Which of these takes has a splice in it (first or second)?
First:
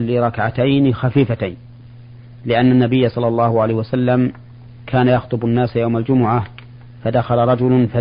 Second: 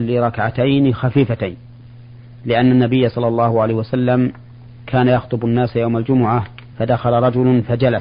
second